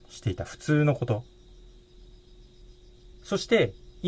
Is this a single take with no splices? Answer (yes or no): no